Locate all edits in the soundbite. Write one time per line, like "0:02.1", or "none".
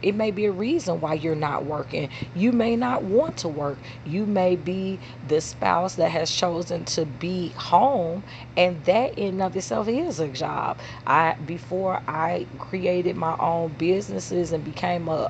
0:12.6